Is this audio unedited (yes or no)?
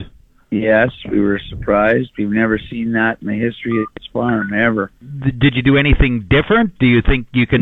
yes